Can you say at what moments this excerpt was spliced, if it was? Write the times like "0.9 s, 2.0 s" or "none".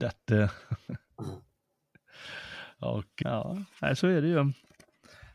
3.2 s